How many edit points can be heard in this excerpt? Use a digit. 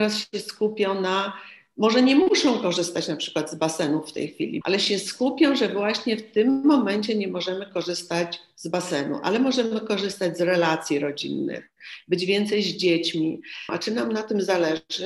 2